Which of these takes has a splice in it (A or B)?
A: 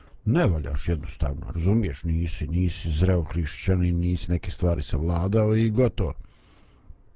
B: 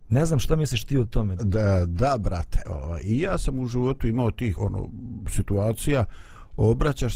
B